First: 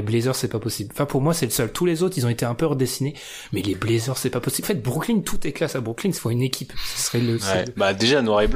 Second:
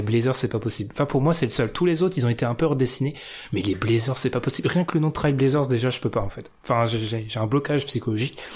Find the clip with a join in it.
first; 2 cuts; at 4.6 s, 6.2 s

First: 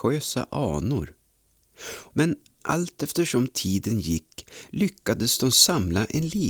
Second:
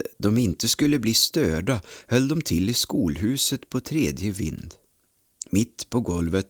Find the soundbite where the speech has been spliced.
first; 1 cut; at 2.1 s

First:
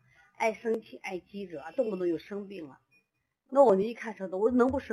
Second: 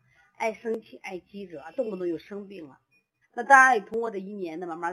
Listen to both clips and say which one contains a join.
second; 1 cut; at 3.2 s

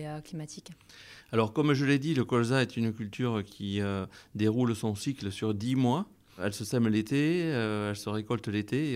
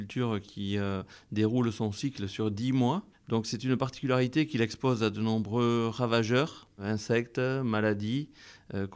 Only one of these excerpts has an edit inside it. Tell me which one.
second; 1 cut; at 3.1 s

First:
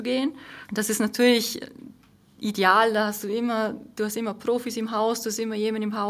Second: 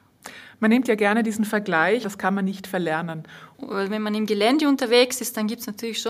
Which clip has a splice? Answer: second; 2 cuts; at 2.0 s, 3.5 s

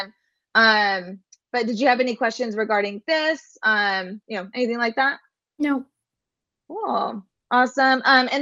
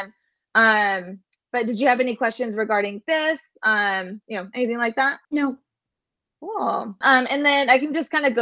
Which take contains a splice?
second; 2 cuts; at 5.2 s, 7.0 s

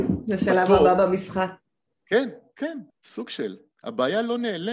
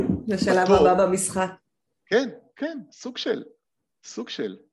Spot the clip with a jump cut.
first; 1 cut; at 2.9 s

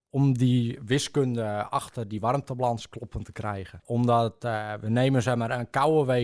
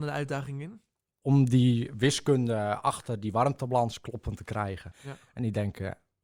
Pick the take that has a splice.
second; 1 cut; at 4.9 s

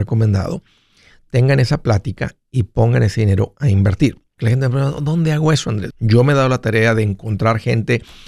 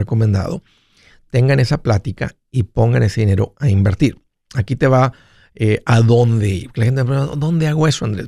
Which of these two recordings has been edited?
first; 2 cuts; at 4.4 s, 5.9 s

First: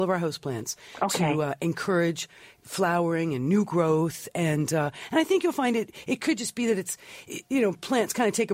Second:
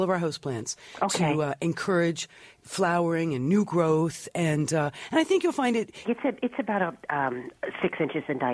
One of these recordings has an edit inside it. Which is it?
second; 1 cut; at 6.0 s

